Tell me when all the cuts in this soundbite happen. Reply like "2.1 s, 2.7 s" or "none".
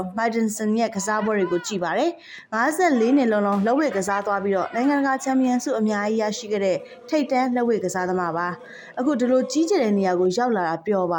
none